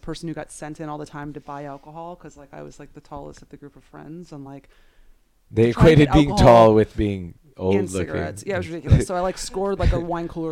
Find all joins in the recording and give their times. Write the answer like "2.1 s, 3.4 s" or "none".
none